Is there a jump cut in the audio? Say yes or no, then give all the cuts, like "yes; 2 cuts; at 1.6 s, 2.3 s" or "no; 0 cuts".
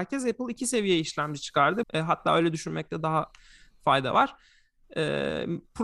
yes; 1 cut; at 1.8 s